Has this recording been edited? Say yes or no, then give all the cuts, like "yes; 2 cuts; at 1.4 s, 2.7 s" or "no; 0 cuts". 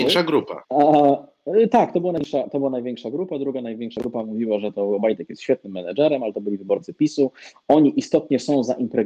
no; 0 cuts